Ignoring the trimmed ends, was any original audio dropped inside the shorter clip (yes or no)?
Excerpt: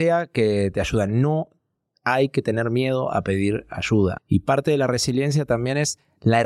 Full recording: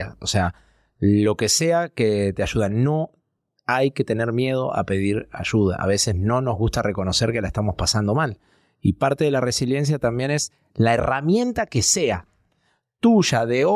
yes